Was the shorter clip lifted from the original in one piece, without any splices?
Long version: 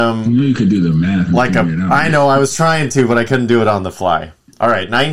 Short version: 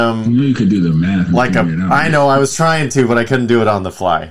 yes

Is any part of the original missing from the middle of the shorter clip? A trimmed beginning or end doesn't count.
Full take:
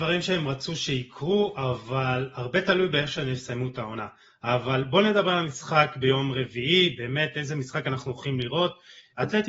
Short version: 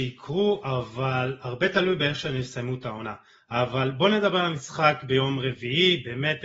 no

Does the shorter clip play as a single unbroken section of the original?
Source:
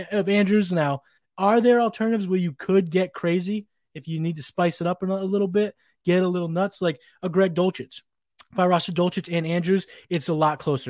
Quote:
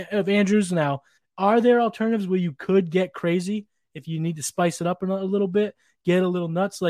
yes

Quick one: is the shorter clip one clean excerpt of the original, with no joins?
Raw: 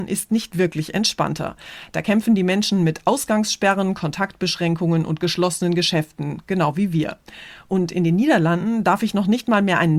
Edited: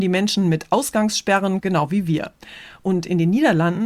no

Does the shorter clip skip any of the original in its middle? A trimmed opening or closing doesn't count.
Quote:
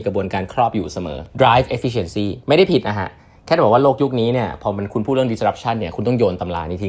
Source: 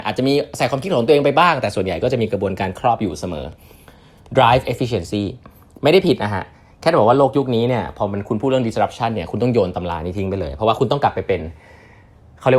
yes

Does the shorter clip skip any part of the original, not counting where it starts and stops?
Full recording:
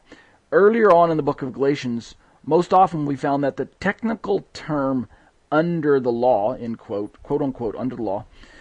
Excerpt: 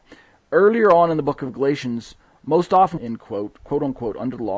yes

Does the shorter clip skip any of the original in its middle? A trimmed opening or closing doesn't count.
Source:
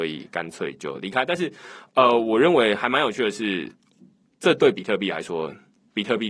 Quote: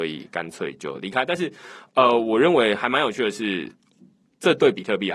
no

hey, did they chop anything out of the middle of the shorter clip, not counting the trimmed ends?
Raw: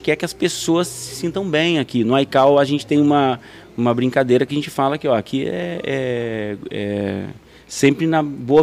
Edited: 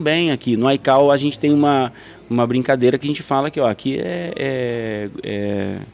no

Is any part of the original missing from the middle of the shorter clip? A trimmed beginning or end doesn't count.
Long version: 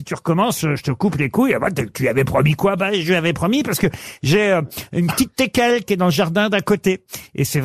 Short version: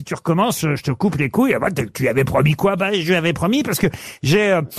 no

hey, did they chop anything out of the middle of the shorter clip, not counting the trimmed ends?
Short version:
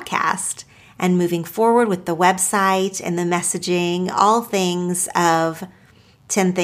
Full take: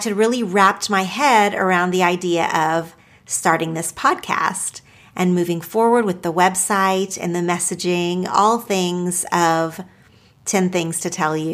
no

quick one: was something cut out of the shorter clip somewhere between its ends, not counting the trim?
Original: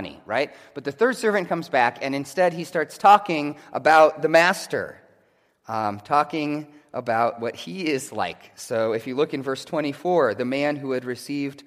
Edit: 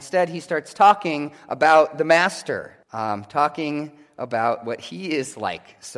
yes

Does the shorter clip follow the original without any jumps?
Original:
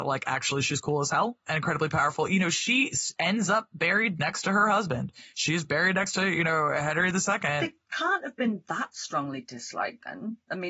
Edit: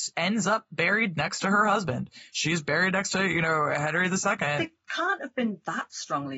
yes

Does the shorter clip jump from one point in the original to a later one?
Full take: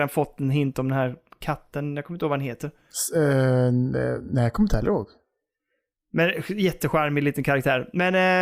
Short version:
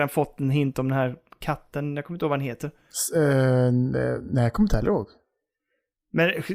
no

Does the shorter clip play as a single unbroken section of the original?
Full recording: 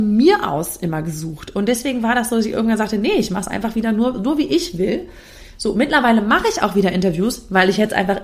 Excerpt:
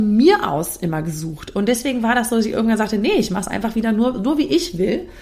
yes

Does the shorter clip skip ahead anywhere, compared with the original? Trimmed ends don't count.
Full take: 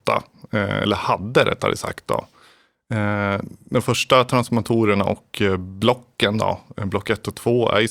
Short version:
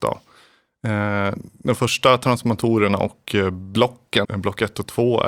yes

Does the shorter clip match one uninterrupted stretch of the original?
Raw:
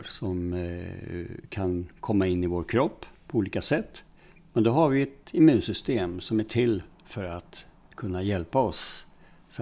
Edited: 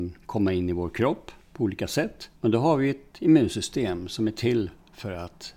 no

